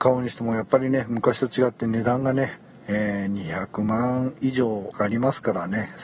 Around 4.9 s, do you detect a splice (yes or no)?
yes